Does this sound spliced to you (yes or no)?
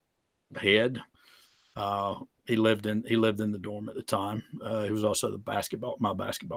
no